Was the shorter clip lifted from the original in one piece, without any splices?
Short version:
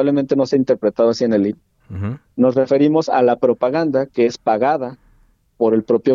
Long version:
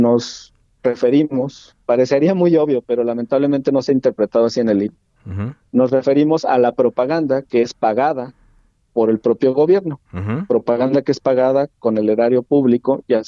yes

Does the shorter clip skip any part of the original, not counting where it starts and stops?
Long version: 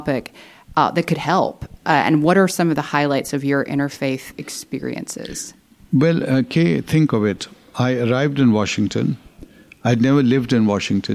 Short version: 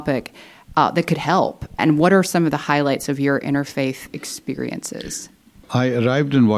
yes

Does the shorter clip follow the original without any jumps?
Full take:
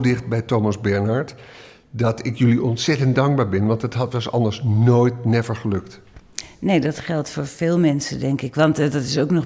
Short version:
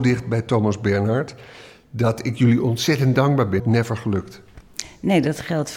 no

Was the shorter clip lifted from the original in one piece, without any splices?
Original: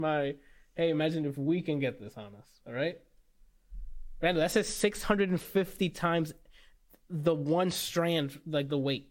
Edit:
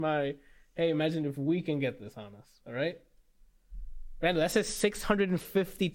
yes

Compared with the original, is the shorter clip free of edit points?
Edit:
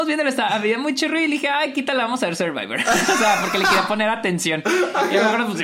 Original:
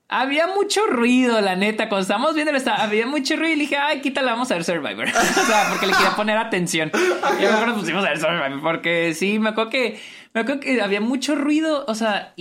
yes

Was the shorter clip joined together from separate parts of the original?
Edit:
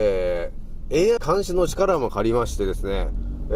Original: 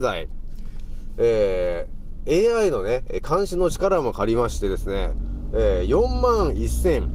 yes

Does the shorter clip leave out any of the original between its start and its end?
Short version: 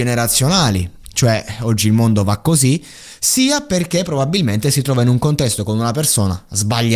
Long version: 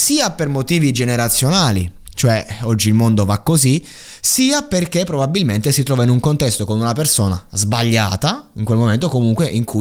no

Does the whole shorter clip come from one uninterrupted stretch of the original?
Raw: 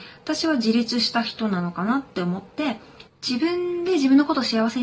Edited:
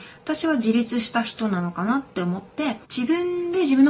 no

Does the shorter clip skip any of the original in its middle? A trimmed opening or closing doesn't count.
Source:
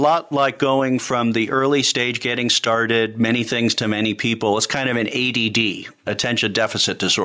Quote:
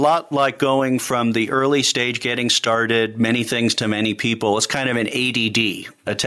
no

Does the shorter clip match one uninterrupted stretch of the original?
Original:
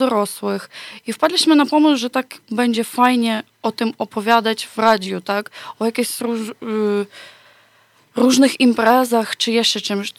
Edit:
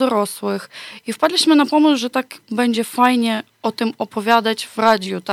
yes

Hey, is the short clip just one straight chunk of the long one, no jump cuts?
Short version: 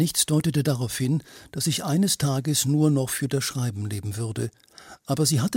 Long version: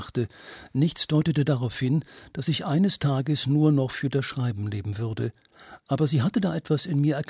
yes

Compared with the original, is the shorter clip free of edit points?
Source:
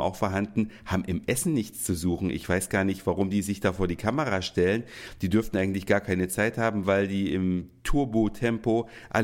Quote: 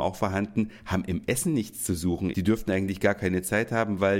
no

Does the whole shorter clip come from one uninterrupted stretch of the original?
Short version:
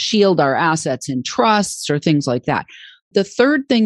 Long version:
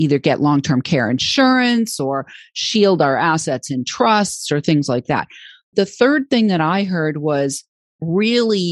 yes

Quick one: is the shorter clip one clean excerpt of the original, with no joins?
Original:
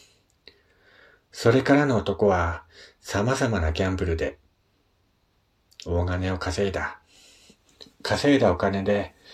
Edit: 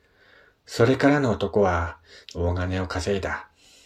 no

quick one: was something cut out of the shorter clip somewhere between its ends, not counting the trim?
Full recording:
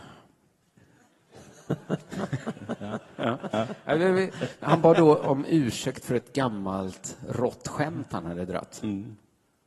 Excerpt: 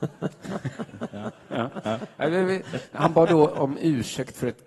no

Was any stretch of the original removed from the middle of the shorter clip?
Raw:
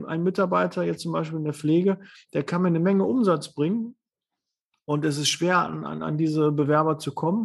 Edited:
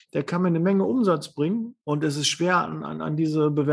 yes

